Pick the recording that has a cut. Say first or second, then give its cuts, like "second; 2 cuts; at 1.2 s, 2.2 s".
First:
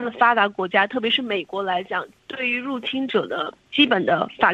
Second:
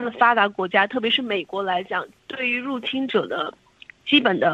first; 1 cut; at 3.6 s